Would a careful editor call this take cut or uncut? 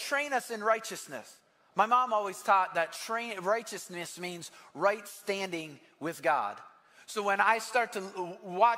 uncut